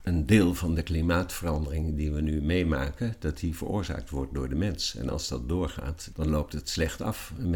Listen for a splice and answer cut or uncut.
cut